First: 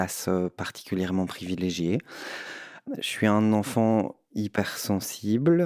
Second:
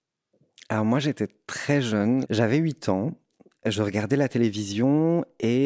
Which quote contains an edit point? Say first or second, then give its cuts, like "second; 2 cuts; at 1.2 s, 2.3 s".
second; 1 cut; at 2.2 s